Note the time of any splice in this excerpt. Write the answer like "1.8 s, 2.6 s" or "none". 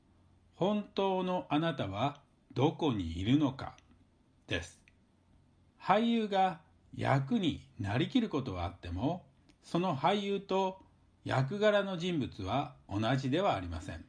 none